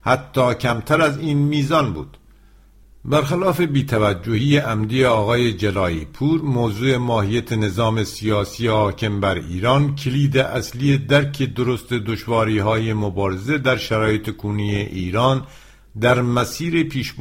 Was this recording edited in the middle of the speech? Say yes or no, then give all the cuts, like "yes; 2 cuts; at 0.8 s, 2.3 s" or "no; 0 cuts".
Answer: no; 0 cuts